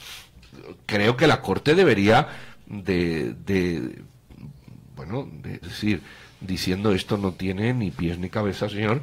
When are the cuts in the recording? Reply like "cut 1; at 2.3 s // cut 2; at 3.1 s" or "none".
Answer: cut 1; at 5.6 s